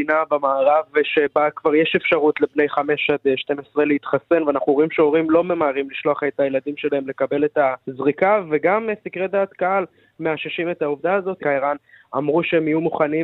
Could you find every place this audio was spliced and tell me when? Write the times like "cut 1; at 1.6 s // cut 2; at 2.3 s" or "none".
cut 1; at 7.8 s // cut 2; at 11.4 s